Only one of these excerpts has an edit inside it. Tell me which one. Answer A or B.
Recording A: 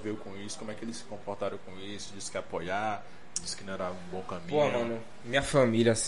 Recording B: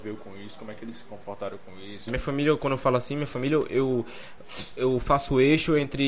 B